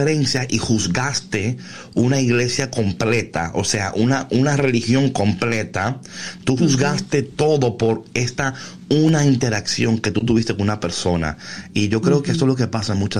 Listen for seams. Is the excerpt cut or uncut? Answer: uncut